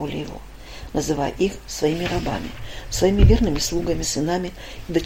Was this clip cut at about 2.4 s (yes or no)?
no